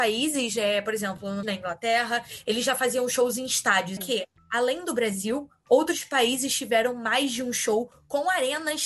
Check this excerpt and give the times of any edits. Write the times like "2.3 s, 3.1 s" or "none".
1.4 s, 4.0 s